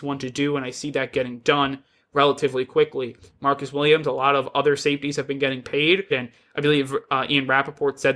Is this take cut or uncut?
cut